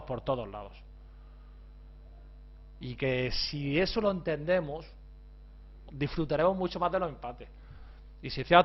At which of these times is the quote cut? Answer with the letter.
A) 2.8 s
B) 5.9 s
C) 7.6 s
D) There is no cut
B